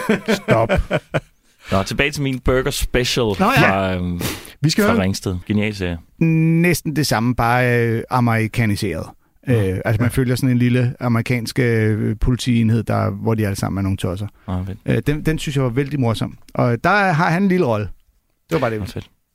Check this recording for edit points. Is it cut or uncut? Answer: cut